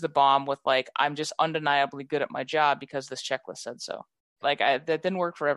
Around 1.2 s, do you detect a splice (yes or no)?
no